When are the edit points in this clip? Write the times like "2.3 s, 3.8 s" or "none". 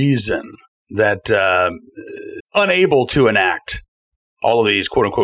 2.4 s